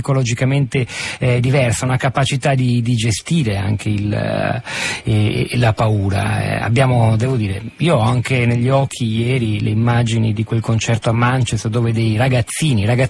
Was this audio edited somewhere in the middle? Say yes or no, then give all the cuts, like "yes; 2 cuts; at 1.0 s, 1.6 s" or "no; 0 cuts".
no; 0 cuts